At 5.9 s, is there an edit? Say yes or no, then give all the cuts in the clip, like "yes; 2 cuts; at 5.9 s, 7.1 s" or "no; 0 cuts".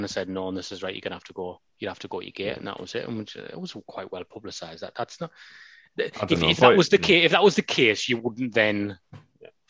no; 1 cut; at 1.7 s